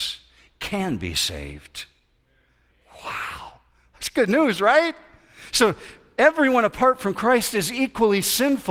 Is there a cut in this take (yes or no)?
no